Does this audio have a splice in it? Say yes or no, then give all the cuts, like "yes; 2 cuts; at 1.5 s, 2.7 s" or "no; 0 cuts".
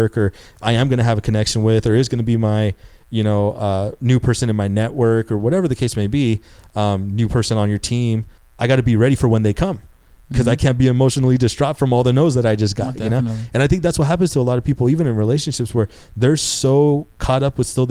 no; 0 cuts